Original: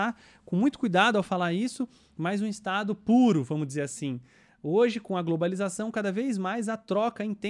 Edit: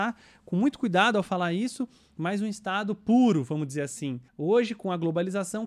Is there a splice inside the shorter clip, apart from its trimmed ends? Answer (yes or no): yes